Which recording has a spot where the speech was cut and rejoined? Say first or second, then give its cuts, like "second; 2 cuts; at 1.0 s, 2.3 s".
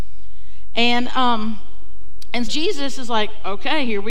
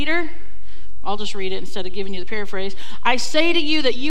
first; 1 cut; at 2.4 s